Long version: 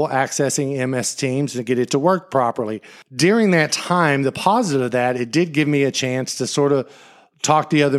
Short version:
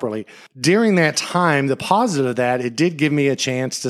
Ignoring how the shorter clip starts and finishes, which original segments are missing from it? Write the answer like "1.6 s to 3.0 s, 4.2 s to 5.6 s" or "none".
none